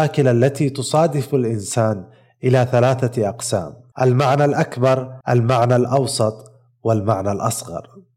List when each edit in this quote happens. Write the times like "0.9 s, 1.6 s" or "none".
3.9 s, 5.2 s